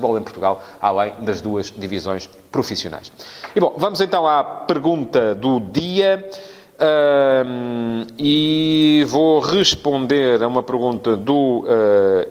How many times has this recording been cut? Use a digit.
0